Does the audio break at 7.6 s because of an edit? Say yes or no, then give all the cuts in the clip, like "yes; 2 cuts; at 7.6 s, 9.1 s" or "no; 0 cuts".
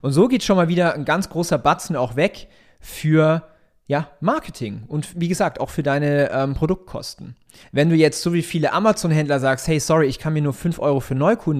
yes; 2 cuts; at 5.1 s, 7.6 s